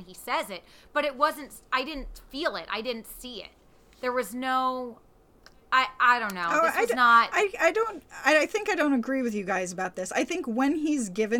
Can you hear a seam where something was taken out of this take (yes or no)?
no